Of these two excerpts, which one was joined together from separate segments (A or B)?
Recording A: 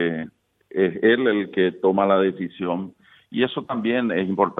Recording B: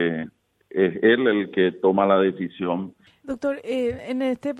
B